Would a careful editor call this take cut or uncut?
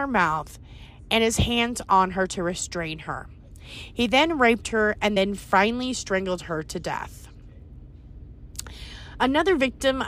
uncut